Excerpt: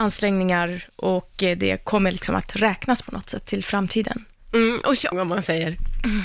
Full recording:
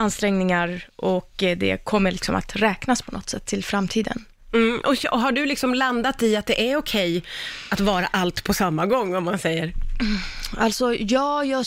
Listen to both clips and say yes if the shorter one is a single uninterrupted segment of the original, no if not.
no